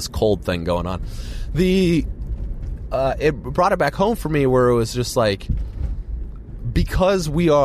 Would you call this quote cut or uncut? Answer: uncut